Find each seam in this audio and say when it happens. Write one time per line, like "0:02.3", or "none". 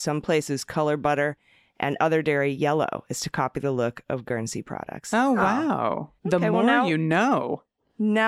0:06.2